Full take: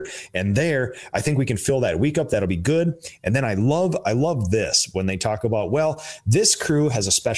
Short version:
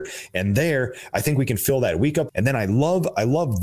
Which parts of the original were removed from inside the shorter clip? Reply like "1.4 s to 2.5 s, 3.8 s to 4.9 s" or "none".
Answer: 2.3 s to 3.2 s